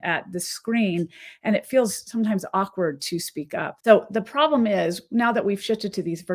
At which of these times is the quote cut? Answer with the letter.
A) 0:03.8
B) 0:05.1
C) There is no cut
A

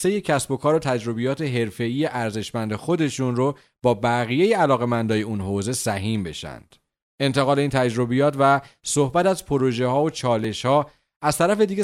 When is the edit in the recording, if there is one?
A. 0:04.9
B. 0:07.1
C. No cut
B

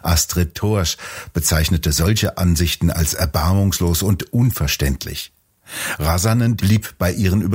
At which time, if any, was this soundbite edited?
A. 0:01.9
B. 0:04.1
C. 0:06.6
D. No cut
C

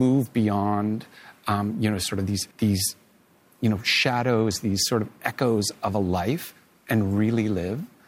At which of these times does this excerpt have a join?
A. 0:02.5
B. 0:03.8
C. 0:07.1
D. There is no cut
A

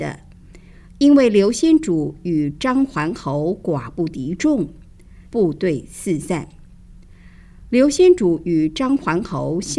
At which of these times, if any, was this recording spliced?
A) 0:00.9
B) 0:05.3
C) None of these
B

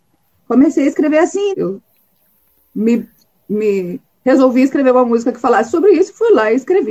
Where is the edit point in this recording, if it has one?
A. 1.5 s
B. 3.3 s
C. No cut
A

